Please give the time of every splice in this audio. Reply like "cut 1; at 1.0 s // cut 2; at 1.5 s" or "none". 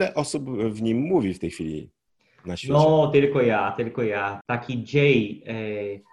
cut 1; at 4.4 s